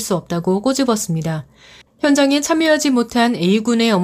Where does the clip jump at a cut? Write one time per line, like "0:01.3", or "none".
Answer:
0:01.8